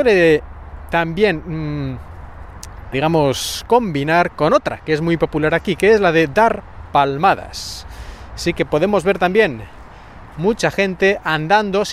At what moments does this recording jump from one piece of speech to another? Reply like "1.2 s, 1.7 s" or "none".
2.9 s